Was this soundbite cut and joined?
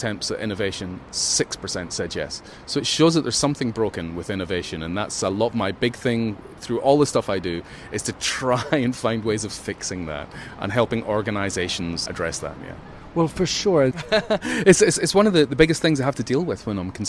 yes; 2 cuts; at 12.1 s, 13.9 s

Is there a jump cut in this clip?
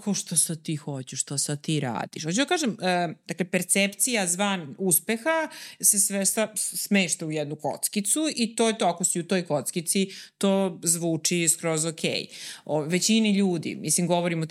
no; 0 cuts

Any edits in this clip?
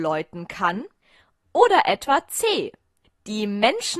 no; 0 cuts

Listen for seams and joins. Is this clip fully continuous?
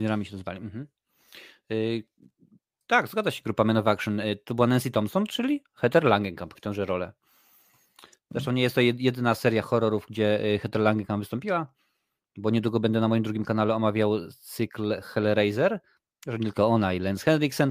no; 2 cuts; at 6.5 s, 16.1 s

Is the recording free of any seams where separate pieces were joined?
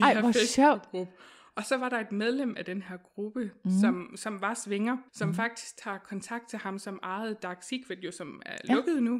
no; 1 cut; at 5.1 s

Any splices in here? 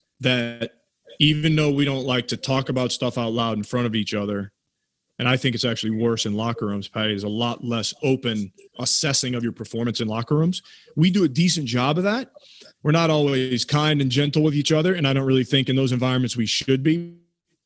no; 0 cuts

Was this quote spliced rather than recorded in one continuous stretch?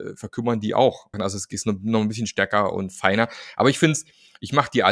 yes; 1 cut; at 1.1 s

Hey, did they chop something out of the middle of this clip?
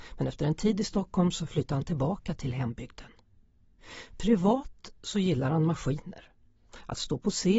no; 0 cuts

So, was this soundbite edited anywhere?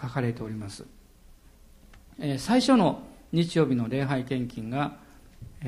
no; 0 cuts

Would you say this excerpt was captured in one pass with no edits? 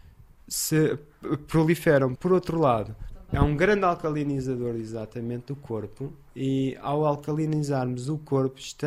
no; 1 cut; at 2.2 s

